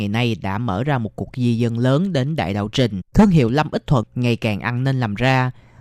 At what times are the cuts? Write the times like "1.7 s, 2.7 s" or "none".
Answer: 3.1 s